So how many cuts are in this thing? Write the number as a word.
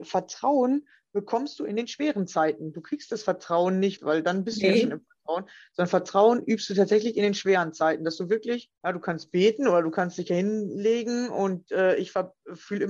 two